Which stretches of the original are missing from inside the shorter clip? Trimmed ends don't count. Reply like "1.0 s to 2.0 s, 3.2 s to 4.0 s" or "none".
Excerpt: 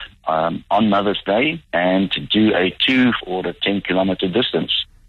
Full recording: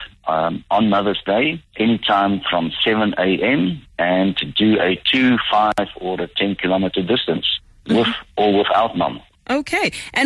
1.7 s to 3.9 s, 5.4 s to 5.9 s